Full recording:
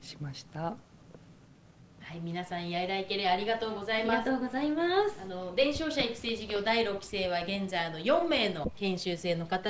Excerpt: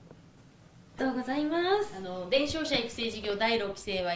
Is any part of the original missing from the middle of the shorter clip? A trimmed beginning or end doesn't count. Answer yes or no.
yes